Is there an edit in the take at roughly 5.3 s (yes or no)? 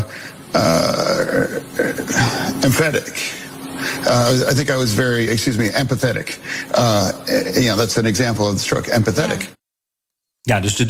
no